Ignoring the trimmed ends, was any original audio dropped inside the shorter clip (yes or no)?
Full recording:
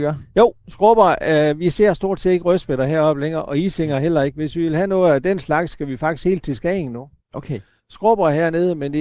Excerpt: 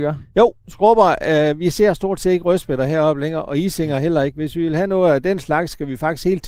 no